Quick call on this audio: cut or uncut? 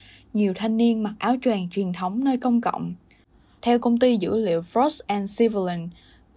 cut